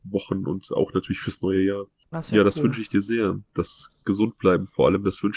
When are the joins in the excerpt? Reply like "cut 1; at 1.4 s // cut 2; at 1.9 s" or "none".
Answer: cut 1; at 2.1 s